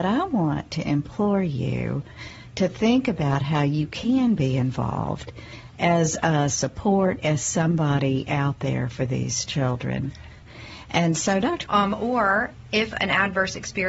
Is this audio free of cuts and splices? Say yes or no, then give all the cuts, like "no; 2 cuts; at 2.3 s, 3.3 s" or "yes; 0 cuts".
no; 1 cut; at 11.7 s